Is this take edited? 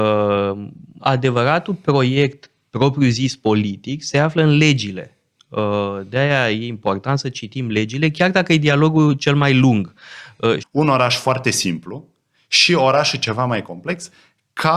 yes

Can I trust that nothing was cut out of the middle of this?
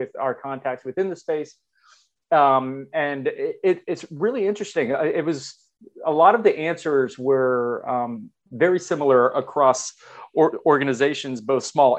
yes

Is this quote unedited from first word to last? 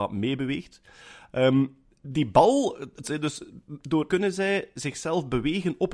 no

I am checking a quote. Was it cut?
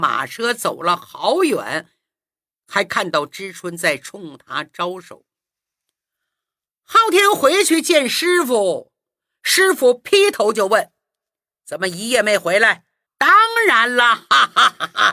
yes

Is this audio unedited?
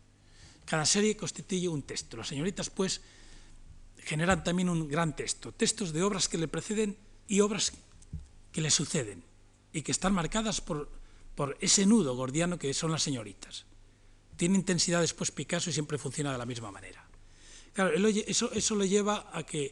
no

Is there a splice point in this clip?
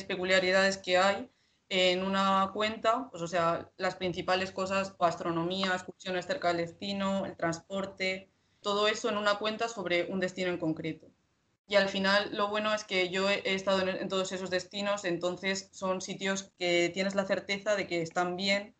yes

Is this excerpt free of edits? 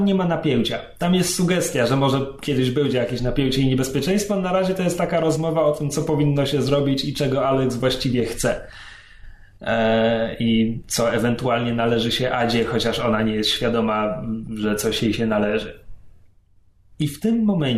yes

